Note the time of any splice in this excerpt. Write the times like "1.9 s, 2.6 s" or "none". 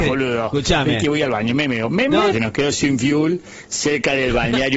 2.3 s